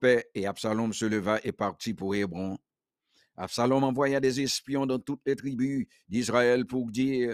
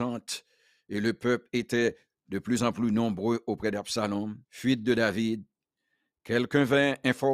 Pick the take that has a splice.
second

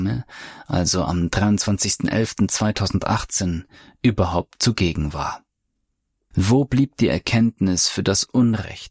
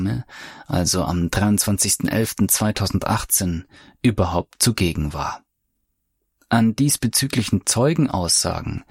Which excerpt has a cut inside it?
first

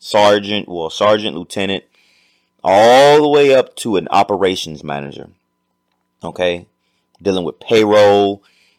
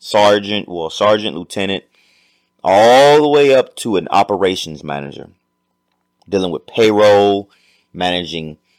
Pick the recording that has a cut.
second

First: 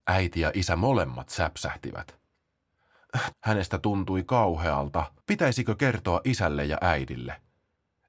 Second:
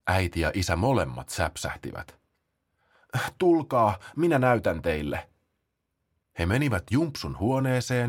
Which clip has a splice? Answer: first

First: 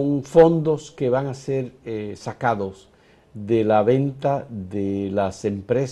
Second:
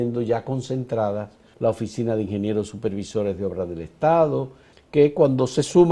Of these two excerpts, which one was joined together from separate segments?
second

